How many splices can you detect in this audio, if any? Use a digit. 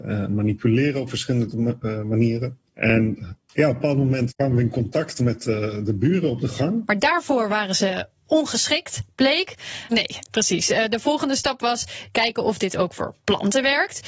2